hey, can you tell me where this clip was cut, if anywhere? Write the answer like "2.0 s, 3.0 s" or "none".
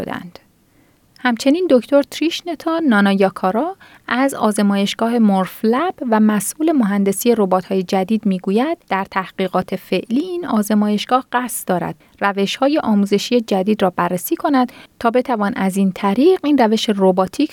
1.1 s, 8.8 s